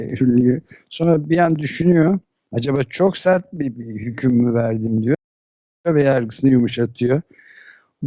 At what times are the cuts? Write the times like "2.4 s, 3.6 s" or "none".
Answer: none